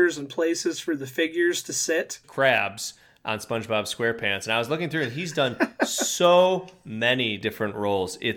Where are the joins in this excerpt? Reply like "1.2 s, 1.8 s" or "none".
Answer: 2.2 s